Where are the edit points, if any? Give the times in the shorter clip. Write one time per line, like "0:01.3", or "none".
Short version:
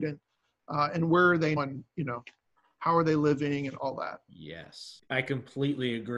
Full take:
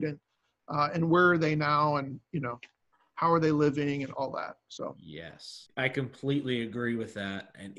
0:01.6
0:04.3

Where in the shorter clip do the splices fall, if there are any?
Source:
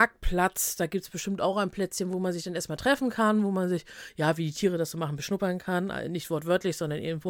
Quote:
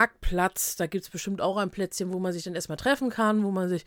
none

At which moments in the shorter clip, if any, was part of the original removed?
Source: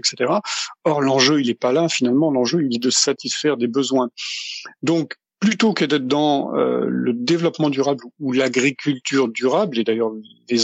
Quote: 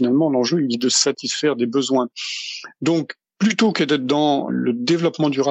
0:04.5

